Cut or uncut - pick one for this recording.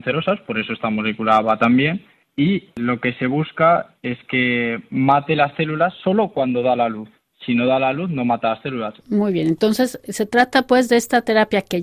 cut